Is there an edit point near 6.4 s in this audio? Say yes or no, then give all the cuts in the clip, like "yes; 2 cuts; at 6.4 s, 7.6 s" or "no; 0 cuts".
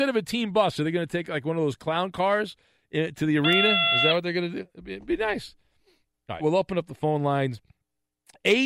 yes; 1 cut; at 6.4 s